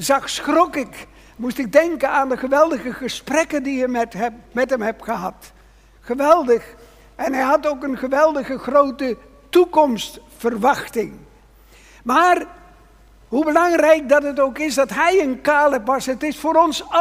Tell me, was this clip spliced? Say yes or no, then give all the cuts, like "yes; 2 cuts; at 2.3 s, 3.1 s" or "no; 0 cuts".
no; 0 cuts